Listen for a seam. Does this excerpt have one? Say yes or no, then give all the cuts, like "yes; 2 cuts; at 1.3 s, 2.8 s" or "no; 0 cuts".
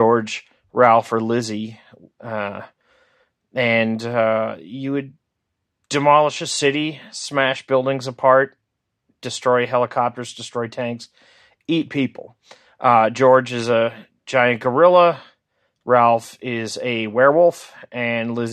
no; 0 cuts